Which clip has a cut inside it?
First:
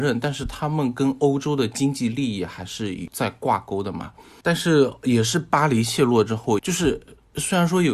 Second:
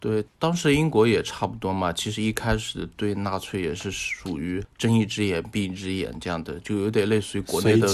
first; 2 cuts; at 4.4 s, 6.6 s

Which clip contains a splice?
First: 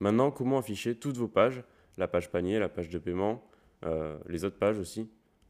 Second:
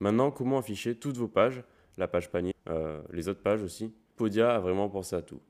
second; 2 cuts; at 2.5 s, 4.2 s

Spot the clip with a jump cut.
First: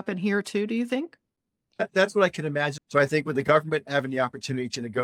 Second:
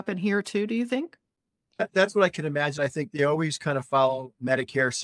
first; 1 cut; at 2.8 s

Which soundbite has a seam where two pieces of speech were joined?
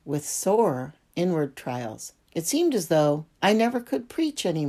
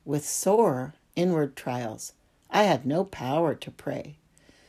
first; 2 cuts; at 2.2 s, 3.3 s

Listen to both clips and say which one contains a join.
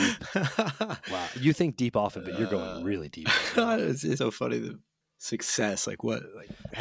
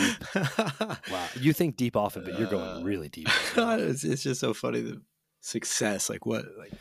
first; 1 cut; at 4.2 s

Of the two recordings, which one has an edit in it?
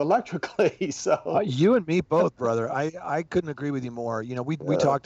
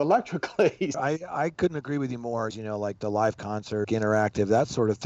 second; 3 cuts; at 0.9 s, 2.5 s, 3.8 s

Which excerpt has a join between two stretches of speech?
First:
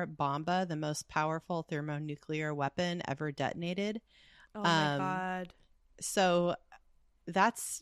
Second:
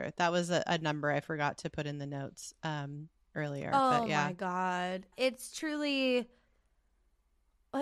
second; 1 cut; at 5.1 s

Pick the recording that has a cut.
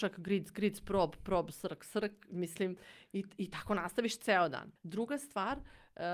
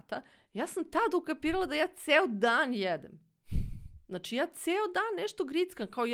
first; 1 cut; at 4.8 s

